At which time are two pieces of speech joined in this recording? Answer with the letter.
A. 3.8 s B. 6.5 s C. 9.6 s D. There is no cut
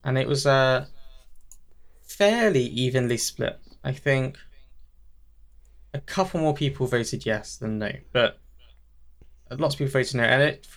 D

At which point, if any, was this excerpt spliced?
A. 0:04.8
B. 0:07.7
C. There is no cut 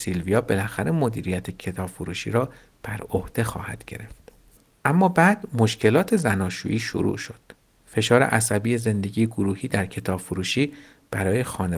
C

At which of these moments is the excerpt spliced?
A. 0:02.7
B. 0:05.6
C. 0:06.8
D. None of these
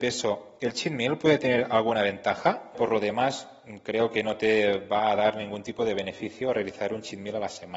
A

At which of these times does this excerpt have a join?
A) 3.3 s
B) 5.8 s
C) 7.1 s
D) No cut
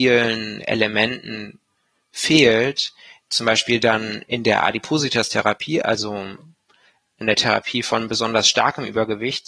A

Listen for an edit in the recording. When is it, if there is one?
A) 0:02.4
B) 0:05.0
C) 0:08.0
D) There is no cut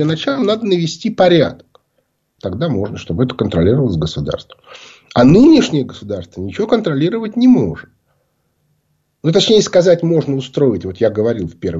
A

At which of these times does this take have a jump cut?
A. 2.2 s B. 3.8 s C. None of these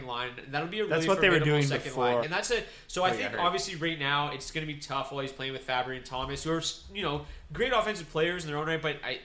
A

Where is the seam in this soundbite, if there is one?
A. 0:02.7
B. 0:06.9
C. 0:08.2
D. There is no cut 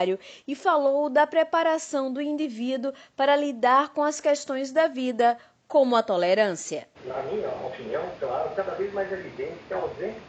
B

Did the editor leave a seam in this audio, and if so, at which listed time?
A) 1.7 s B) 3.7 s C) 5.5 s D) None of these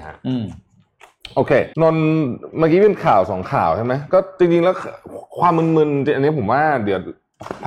A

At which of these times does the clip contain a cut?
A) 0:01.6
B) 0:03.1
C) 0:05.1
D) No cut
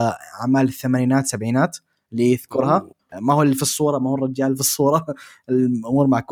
B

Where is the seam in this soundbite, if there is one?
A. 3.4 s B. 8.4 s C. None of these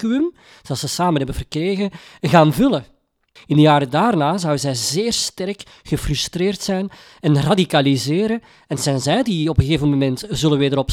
A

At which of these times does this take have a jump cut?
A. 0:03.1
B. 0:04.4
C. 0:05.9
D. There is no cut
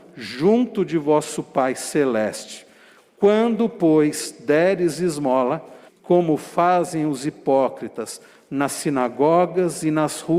C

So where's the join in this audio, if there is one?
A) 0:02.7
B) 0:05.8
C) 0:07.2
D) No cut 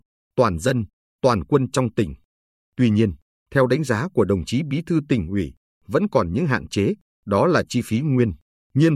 C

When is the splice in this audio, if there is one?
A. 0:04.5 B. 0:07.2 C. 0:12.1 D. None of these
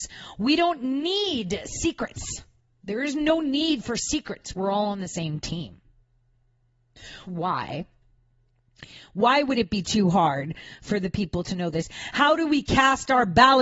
B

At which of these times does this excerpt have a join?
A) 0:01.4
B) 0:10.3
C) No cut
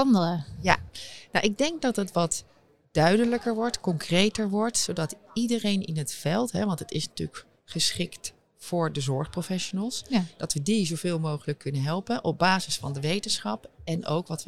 C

